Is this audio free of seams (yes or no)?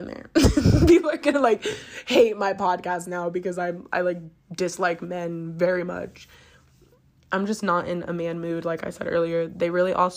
yes